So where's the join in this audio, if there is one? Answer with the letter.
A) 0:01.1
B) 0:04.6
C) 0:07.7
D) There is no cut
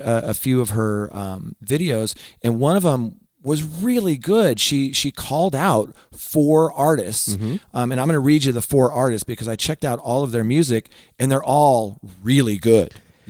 D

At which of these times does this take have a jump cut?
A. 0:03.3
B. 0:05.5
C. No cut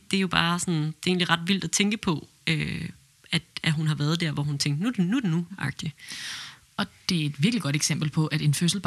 B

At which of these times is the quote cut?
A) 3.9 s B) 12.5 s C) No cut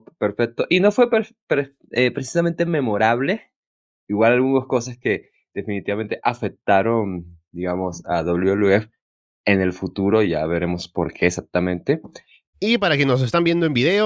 B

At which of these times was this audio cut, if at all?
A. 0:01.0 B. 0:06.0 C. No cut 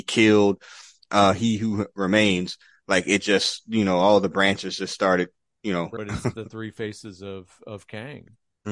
B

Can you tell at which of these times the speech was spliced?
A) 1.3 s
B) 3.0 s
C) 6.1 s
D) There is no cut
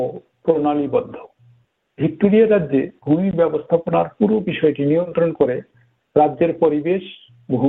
D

